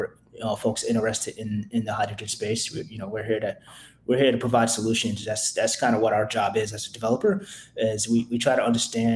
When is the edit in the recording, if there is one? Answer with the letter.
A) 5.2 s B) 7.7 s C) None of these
C